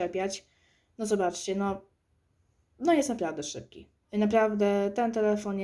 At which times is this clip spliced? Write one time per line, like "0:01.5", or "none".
0:04.0